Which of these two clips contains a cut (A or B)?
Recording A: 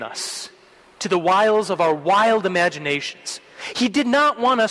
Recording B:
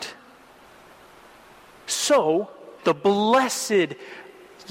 B